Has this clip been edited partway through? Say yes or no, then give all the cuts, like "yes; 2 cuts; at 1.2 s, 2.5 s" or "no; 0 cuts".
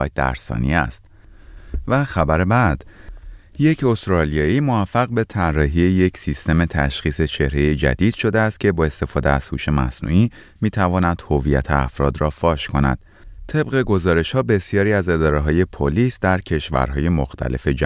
no; 0 cuts